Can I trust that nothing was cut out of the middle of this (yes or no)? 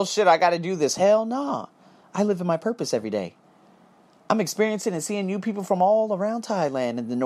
yes